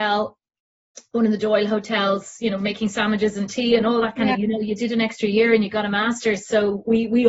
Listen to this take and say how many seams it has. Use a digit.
1